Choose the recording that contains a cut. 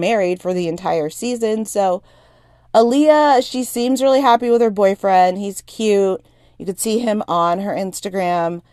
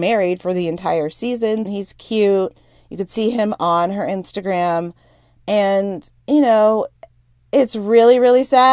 second; 1 cut; at 1.7 s

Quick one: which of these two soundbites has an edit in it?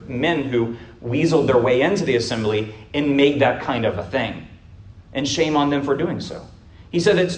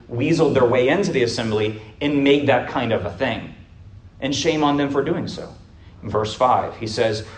second; 1 cut; at 6.0 s

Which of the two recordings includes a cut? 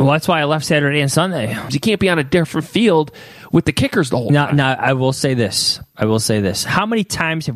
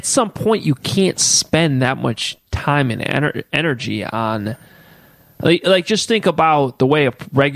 first; 1 cut; at 1.7 s

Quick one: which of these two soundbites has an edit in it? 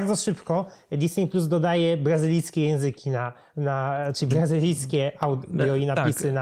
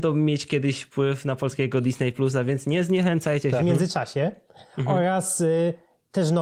second; 1 cut; at 3.6 s

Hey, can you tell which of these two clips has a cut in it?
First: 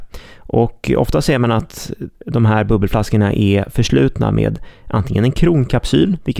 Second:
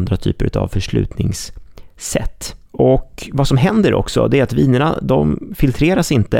second; 1 cut; at 2.7 s

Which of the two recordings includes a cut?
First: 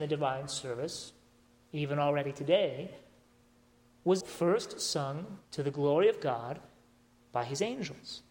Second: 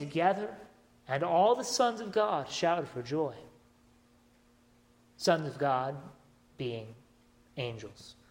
first; 2 cuts; at 4.2 s, 5.4 s

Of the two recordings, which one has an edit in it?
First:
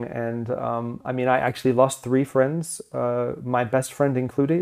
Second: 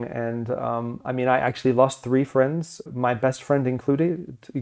second; 1 cut; at 2.9 s

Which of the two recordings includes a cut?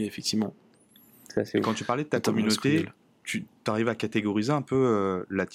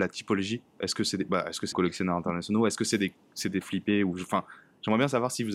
second; 2 cuts; at 1.7 s, 3.6 s

